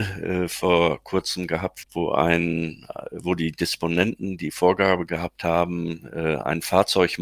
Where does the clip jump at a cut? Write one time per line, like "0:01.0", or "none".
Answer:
0:01.8

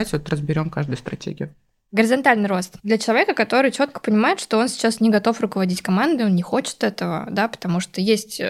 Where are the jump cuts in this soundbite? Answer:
0:02.8

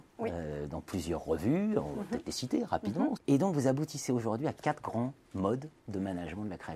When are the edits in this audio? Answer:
0:03.2

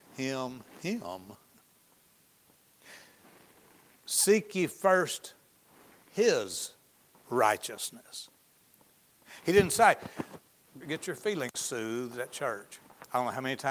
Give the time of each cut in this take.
0:10.8

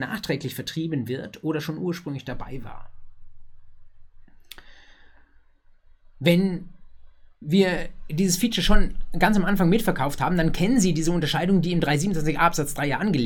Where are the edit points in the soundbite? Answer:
0:07.3

